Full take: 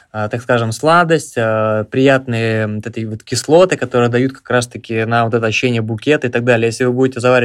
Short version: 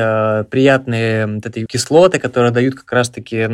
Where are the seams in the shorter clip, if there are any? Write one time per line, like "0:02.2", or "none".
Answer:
0:01.7